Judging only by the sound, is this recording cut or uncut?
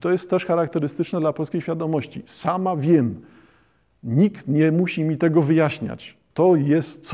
uncut